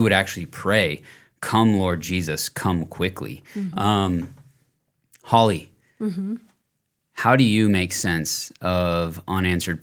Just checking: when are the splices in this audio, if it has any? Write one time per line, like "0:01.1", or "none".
0:03.7